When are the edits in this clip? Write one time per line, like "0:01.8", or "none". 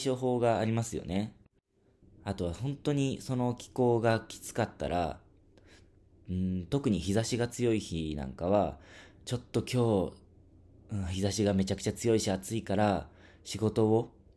0:02.0

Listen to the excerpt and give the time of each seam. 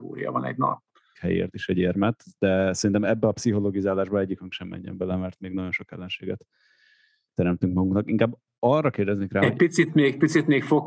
0:01.1

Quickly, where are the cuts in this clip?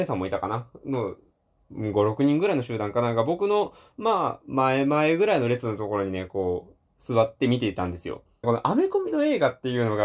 0:08.4

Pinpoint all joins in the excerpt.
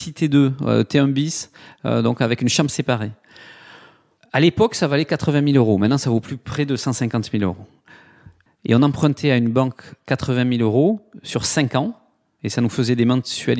0:08.5

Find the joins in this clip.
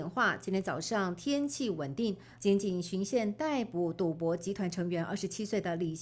0:02.4

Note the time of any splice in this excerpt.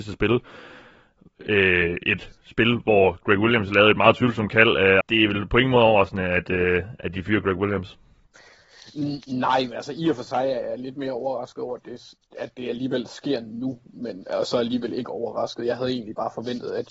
0:05.0

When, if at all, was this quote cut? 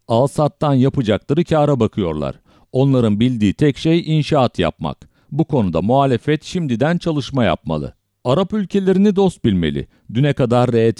none

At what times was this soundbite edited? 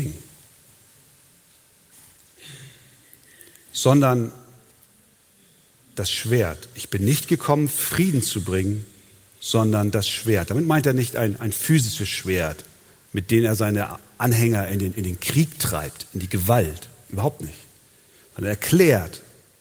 none

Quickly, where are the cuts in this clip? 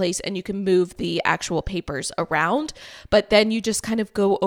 none

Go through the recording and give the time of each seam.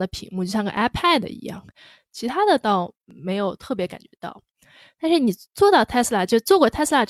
0:02.0

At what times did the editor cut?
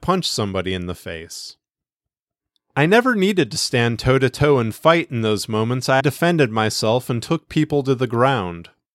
0:06.0

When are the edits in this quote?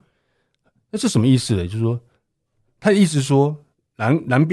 none

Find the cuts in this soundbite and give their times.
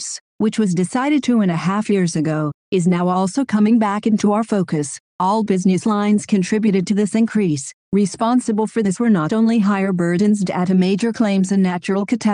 0:05.1
0:07.8

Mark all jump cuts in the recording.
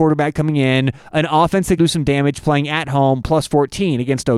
0:01.8

